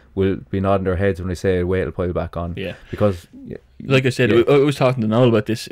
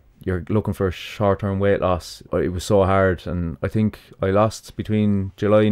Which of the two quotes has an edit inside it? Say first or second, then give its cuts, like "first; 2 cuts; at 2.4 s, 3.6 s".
second; 1 cut; at 2.3 s